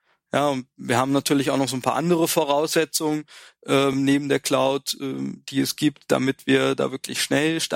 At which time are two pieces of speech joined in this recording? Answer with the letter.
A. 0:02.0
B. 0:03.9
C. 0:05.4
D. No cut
D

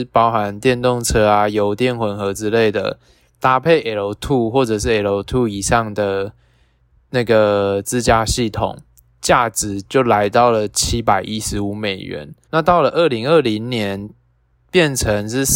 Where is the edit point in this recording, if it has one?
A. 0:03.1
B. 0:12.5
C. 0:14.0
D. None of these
B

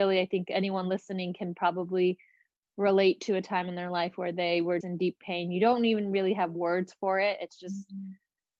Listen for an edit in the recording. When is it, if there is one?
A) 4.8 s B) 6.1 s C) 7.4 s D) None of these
A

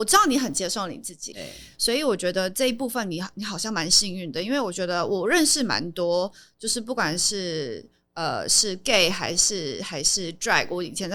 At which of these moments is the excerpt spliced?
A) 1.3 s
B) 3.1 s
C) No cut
A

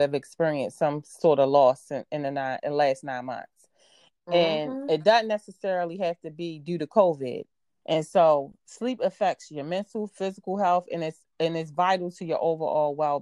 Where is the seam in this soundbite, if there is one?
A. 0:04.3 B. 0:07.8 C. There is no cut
B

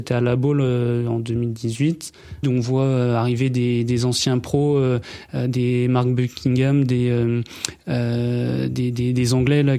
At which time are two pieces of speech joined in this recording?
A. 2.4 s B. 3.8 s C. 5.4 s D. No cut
A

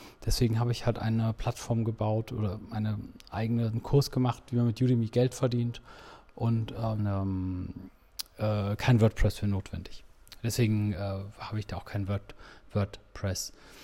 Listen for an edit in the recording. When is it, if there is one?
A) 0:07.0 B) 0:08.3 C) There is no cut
A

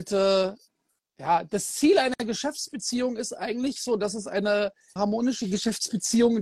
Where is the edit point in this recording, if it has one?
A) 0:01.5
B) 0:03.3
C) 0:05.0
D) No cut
C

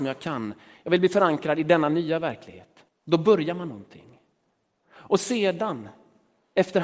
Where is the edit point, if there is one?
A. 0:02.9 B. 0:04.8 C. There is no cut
A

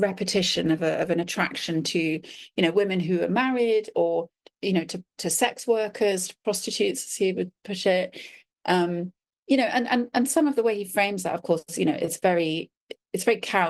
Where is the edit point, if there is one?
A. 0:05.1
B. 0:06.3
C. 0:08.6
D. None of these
D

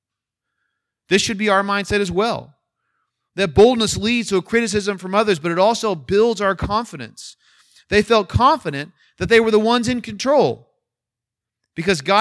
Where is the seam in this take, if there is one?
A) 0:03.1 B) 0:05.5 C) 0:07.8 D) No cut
D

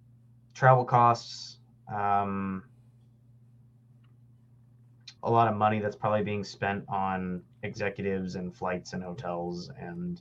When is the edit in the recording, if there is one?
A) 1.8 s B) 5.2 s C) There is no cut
B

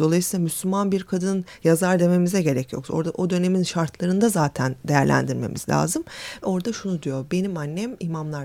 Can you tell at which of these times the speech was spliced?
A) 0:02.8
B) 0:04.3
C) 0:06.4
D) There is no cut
C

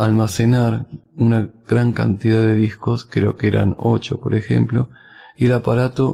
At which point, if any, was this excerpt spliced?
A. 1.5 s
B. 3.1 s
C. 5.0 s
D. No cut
D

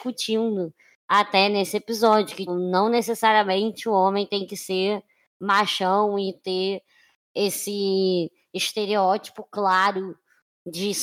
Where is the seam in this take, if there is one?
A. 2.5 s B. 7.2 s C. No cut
A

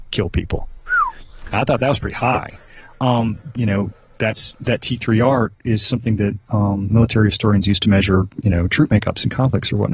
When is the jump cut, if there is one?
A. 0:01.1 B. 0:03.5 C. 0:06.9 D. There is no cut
B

